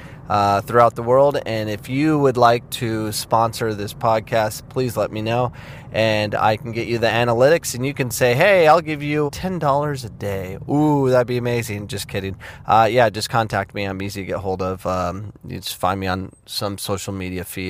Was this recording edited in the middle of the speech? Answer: yes; 1 cut; at 9.3 s

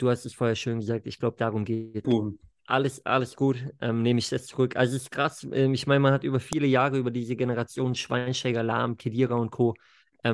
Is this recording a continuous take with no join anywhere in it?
no; 1 cut; at 2.0 s

